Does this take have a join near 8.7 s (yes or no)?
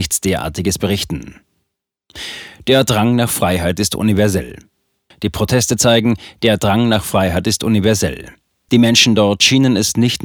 yes